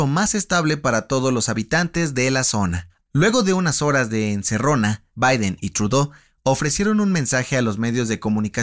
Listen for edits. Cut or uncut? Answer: cut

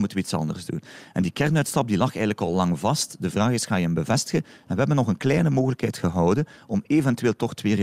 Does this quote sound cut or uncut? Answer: uncut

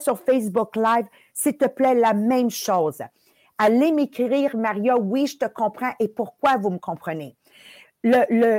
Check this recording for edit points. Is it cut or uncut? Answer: uncut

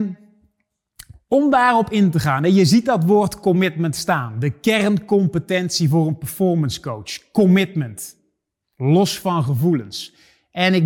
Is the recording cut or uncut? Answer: uncut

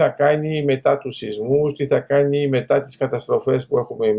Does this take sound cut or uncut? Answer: uncut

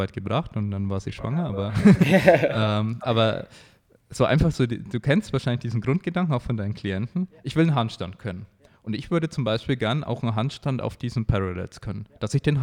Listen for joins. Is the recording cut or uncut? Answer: uncut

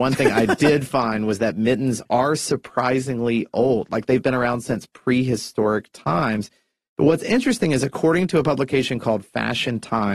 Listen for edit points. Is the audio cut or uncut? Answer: uncut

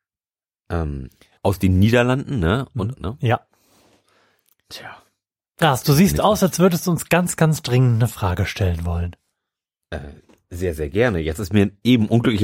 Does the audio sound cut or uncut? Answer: cut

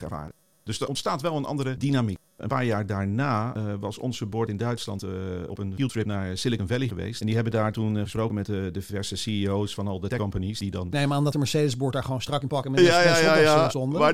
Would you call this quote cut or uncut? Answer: uncut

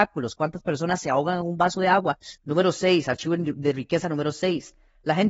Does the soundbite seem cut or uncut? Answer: cut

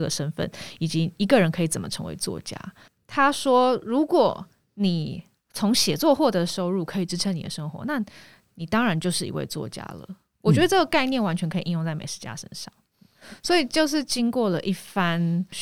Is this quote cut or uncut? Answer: uncut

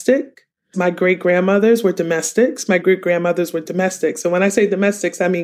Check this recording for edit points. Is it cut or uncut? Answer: cut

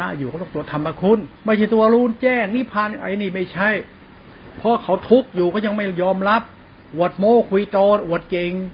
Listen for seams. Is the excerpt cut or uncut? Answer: cut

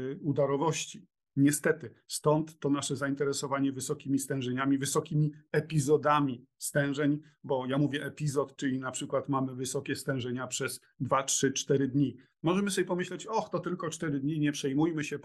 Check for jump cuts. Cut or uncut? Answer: uncut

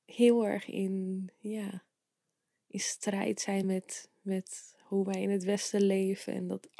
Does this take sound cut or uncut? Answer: uncut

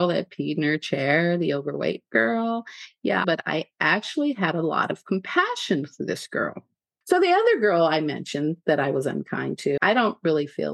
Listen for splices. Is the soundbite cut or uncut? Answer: cut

